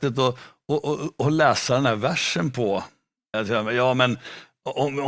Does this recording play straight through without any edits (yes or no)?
no